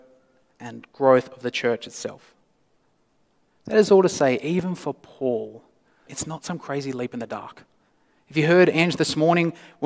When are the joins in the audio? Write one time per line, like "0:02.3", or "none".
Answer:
0:06.1